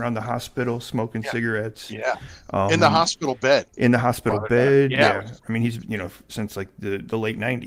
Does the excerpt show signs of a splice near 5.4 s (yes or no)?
yes